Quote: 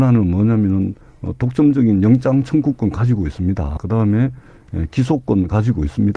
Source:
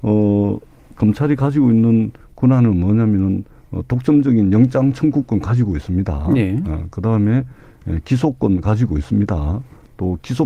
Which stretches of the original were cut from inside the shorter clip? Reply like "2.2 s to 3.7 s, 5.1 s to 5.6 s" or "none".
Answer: 6.3 s to 6.9 s